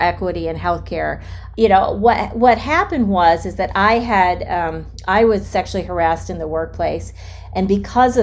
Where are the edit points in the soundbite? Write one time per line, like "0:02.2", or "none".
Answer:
0:01.5